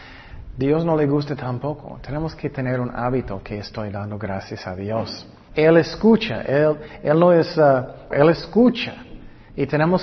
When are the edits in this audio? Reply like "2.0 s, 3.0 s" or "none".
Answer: 5.5 s, 8.1 s